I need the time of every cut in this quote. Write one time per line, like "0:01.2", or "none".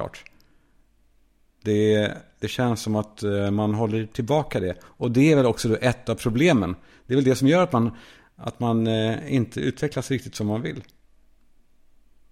none